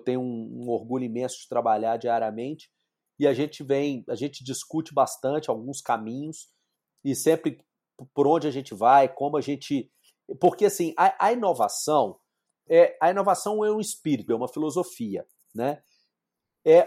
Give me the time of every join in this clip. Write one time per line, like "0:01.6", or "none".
0:12.7
0:14.3